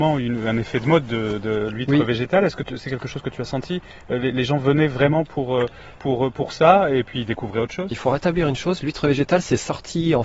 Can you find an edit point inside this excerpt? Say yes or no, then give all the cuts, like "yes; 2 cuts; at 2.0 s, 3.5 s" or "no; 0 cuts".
no; 0 cuts